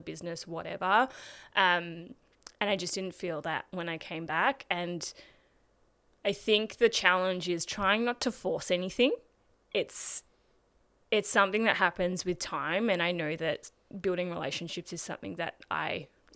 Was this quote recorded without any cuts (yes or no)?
yes